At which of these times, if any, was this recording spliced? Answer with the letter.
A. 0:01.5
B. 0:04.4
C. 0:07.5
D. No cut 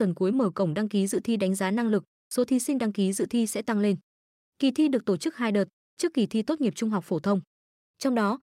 B